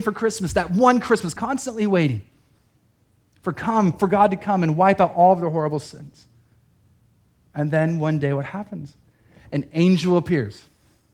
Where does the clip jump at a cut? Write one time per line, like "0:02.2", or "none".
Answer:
0:01.4